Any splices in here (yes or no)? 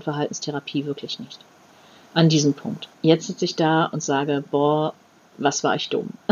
yes